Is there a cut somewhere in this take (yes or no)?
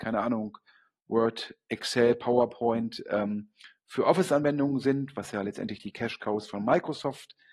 no